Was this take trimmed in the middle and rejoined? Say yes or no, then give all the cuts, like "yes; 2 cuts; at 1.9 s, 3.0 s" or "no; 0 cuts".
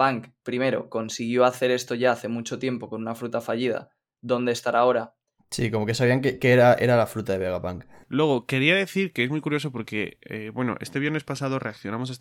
yes; 1 cut; at 5.4 s